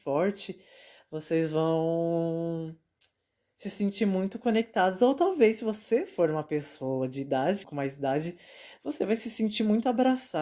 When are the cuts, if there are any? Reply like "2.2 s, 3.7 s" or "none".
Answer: 7.6 s